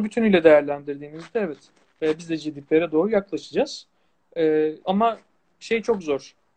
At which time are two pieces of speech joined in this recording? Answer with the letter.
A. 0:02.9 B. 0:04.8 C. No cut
B